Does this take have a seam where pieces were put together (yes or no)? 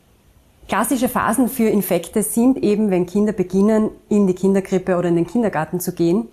no